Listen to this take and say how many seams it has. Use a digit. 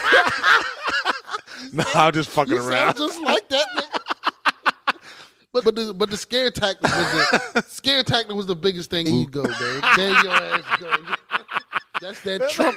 2